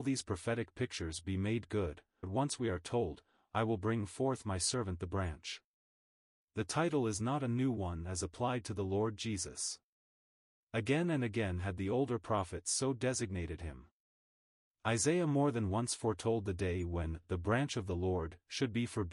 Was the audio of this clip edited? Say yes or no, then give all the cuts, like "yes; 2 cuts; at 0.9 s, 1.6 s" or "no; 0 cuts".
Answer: yes; 1 cut; at 2.2 s